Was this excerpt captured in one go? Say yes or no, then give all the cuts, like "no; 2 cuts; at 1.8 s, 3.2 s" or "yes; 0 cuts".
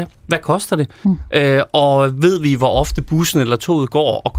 yes; 0 cuts